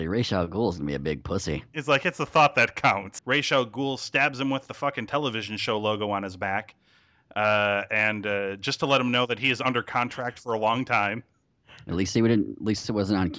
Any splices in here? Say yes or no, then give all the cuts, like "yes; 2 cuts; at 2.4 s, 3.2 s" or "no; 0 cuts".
yes; 1 cut; at 3.2 s